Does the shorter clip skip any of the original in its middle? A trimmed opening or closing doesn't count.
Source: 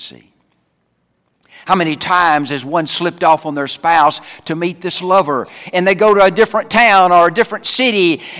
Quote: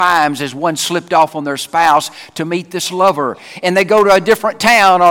no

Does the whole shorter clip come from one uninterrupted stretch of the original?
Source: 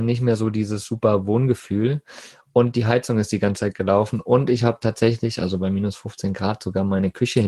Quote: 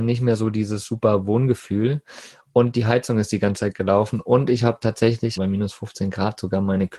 no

